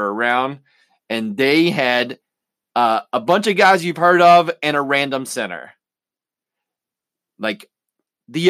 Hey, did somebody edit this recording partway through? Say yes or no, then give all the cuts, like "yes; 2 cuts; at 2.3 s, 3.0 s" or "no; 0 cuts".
no; 0 cuts